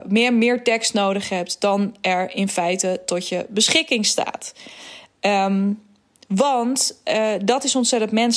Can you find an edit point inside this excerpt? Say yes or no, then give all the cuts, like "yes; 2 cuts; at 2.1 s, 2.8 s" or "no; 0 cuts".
no; 0 cuts